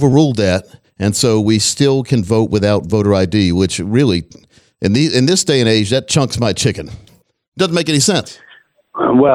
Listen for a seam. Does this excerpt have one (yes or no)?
no